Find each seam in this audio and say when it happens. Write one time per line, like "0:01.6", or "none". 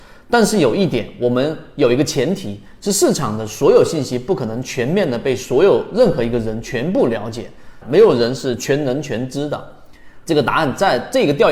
0:07.8
0:10.3